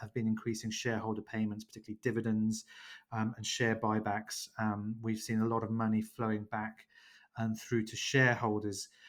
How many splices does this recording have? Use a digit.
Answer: 0